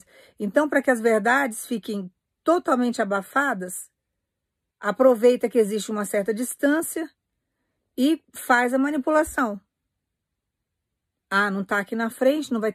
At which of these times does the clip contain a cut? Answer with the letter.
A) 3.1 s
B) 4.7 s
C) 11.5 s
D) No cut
B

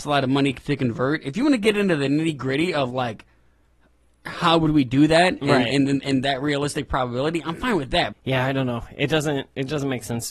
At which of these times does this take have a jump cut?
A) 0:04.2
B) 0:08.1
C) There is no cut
B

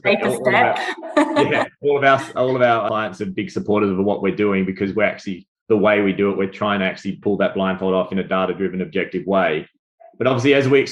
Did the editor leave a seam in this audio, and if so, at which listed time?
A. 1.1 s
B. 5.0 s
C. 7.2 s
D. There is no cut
C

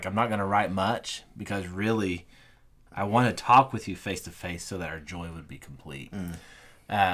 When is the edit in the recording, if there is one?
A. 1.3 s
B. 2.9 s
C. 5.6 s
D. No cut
B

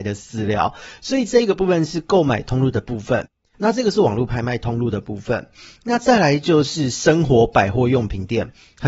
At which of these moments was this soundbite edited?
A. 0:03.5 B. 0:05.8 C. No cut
A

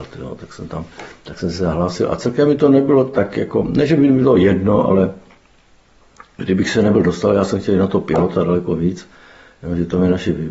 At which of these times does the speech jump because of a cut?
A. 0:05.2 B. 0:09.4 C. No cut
C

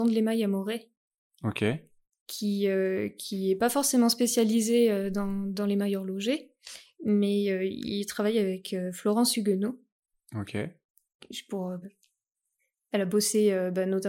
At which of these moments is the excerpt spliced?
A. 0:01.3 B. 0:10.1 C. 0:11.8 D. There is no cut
C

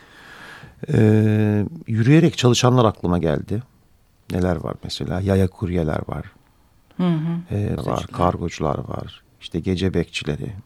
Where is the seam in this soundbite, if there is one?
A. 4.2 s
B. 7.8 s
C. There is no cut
B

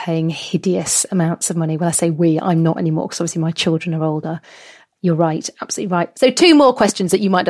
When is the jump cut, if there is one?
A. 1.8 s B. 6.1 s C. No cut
B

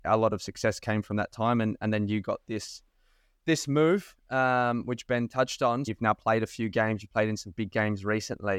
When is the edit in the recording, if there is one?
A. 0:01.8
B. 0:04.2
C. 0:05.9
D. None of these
C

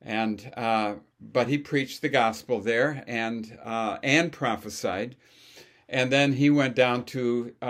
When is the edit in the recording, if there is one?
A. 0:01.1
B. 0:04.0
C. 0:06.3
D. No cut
D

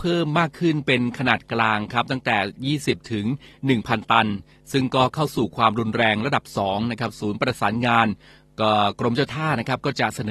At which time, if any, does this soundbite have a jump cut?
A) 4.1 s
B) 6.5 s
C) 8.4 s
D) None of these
D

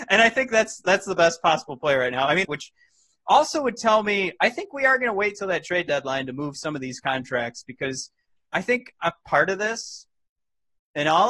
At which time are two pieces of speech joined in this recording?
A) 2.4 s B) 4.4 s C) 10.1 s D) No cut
A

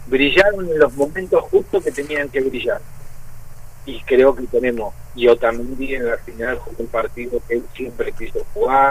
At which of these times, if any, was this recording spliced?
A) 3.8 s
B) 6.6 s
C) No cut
A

